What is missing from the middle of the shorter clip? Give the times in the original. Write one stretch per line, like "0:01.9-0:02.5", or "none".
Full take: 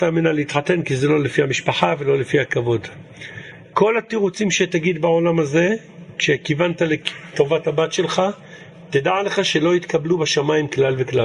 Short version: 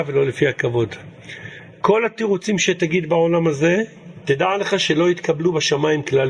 0:06.1-0:08.9